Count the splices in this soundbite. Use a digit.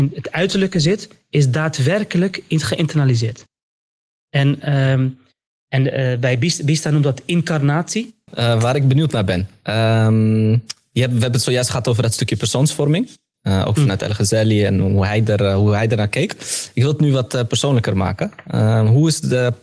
1